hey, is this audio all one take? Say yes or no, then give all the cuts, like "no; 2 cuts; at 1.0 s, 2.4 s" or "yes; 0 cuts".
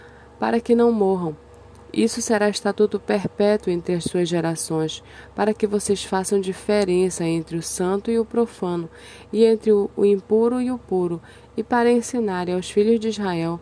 yes; 0 cuts